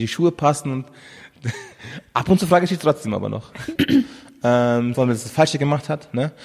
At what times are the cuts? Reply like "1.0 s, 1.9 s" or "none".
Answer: 3.8 s, 4.9 s